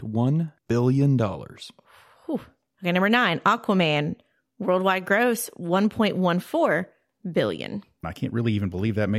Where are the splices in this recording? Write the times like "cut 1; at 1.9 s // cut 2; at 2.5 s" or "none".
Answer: cut 1; at 8.0 s

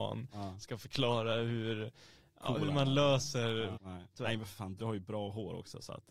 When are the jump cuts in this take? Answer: cut 1; at 3.7 s // cut 2; at 4.8 s

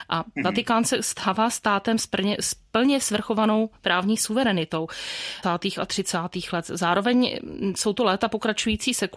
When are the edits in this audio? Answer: cut 1; at 5.4 s

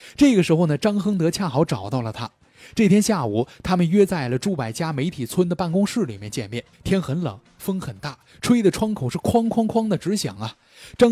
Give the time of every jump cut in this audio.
cut 1; at 6.7 s

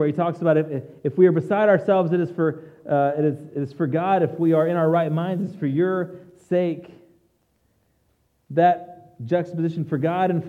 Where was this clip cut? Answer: none

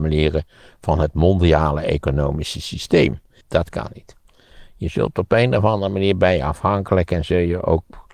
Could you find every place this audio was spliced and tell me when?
cut 1; at 3.4 s

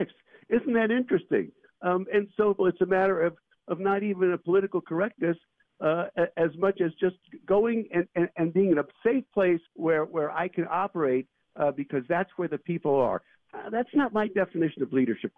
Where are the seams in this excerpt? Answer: cut 1; at 2.6 s // cut 2; at 9.7 s

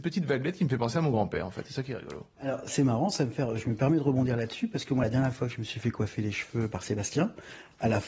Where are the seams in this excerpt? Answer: none

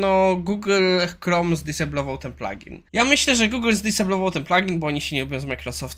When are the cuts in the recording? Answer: cut 1; at 2.9 s

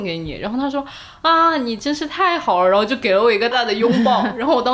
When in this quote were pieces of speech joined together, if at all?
cut 1; at 3.5 s

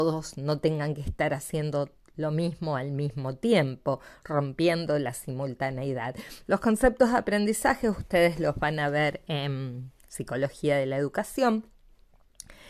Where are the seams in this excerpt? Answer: cut 1; at 6.4 s

